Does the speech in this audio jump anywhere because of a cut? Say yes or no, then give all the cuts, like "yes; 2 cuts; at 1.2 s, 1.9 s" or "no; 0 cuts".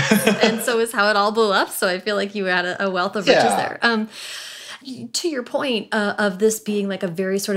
yes; 1 cut; at 4.8 s